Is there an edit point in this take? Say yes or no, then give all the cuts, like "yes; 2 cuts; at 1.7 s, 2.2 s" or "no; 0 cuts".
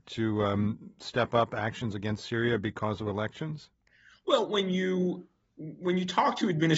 no; 0 cuts